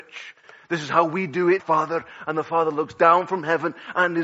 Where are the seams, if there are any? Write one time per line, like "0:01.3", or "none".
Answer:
0:01.6